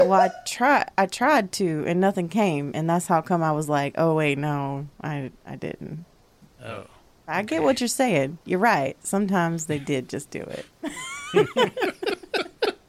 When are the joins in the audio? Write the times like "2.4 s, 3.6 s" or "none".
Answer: 6.5 s